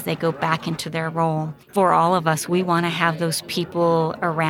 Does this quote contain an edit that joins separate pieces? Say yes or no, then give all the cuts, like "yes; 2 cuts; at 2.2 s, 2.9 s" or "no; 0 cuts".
yes; 1 cut; at 1.6 s